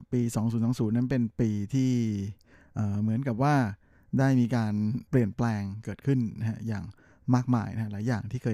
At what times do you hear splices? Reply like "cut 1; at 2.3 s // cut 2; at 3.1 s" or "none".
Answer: cut 1; at 5.1 s